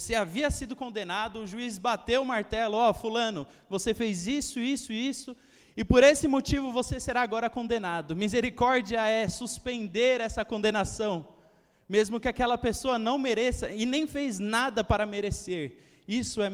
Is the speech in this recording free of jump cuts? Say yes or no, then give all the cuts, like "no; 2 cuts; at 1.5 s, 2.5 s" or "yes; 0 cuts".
yes; 0 cuts